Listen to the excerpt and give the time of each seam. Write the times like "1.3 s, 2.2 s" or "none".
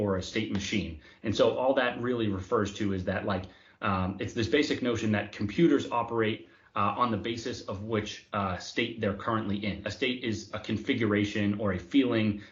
9.8 s